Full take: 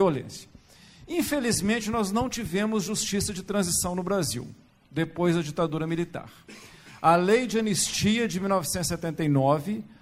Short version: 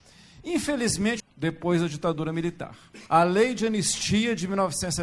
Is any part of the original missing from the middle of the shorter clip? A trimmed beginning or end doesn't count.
yes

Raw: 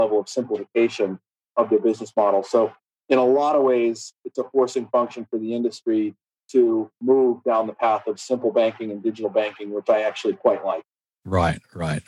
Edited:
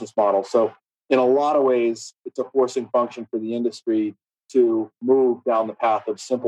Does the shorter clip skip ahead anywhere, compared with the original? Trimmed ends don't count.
no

